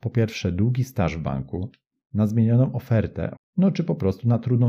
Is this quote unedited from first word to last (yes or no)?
no